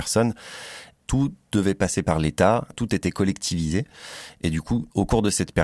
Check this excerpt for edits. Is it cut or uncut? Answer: cut